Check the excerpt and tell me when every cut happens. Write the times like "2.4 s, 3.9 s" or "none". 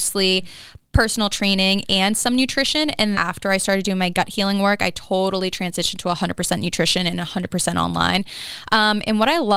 3.1 s